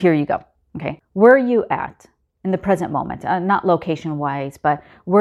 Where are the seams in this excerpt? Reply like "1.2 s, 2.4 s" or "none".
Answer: 1.0 s

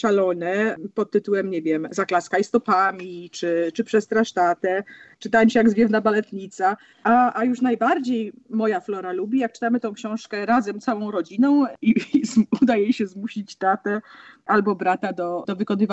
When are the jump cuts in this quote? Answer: 6.9 s

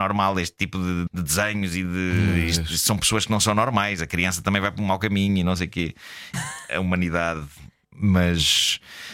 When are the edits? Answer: 1.1 s, 6.3 s, 7.8 s

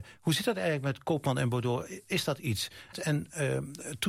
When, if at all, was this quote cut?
2.9 s

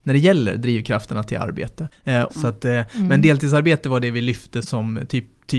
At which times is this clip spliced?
2.3 s, 4.6 s

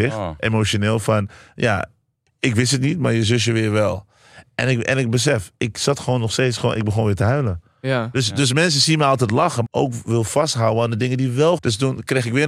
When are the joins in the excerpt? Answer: 9.6 s, 11.6 s

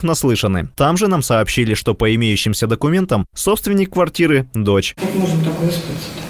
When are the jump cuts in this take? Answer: 5.0 s

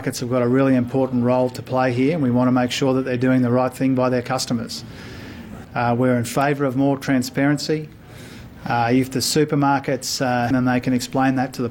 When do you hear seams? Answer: 5.6 s, 10.5 s

